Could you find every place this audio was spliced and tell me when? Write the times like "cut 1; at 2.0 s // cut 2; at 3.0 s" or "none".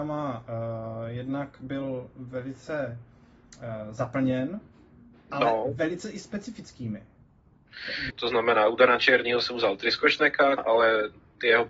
cut 1; at 8.1 s // cut 2; at 10.6 s